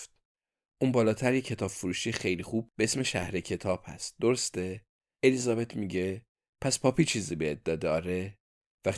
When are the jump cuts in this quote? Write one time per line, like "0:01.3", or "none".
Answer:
0:05.2